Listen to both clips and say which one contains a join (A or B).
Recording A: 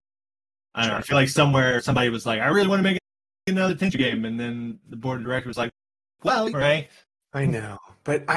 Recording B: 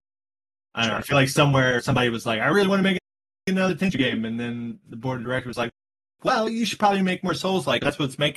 A